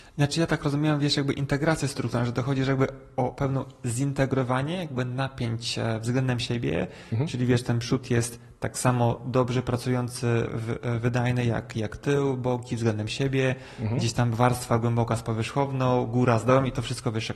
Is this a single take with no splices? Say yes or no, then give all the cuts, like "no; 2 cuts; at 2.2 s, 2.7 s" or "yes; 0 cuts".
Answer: no; 1 cut; at 10.5 s